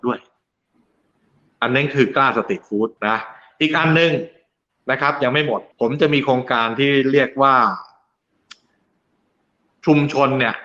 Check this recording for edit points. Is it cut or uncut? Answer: cut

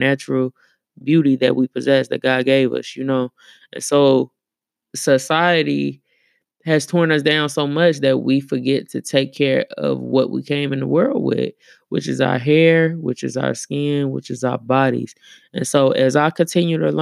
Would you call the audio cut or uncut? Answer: cut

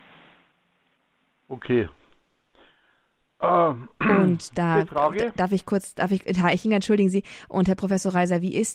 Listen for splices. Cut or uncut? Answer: uncut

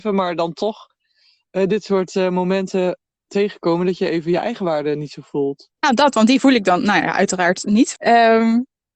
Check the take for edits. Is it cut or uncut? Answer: cut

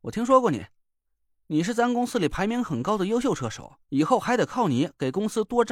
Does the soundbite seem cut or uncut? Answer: cut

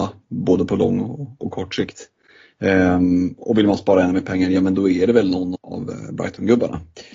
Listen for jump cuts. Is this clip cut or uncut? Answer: cut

